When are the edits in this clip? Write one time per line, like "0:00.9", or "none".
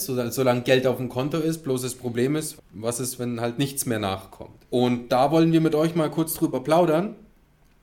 0:02.6
0:04.7